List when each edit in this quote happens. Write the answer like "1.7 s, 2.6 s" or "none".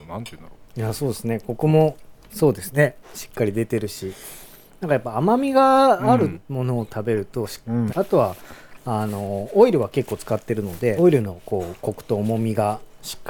7.9 s, 11.0 s